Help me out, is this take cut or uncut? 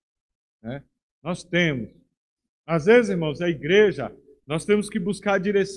uncut